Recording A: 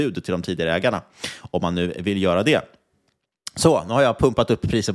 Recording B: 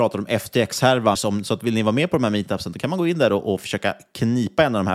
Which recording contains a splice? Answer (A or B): B